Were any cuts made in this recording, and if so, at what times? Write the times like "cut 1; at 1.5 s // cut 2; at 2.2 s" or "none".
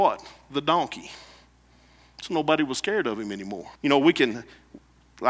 cut 1; at 3.8 s